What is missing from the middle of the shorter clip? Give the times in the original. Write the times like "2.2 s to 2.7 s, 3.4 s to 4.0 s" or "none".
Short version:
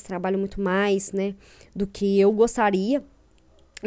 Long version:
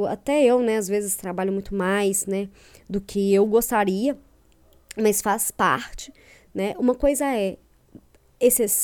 none